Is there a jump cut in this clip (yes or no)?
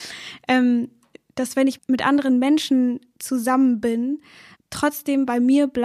yes